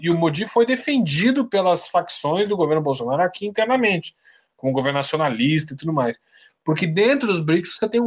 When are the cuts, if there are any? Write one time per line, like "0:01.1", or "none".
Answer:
none